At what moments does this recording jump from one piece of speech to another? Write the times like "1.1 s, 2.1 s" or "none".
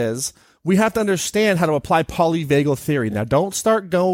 none